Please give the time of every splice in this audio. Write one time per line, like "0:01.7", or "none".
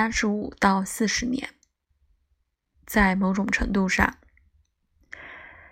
0:02.7